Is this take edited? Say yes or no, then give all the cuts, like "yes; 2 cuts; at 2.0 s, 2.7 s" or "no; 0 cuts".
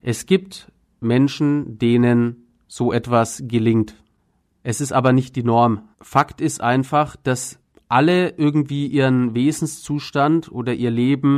yes; 2 cuts; at 4.4 s, 5.9 s